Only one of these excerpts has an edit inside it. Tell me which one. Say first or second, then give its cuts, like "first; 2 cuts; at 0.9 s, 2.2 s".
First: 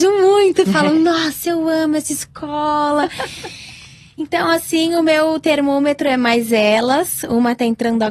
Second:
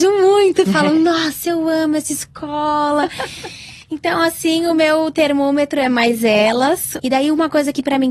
second; 2 cuts; at 3.8 s, 7.0 s